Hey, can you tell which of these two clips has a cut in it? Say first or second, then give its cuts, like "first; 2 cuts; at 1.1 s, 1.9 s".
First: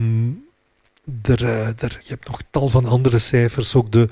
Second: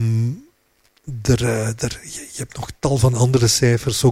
first; 1 cut; at 2.0 s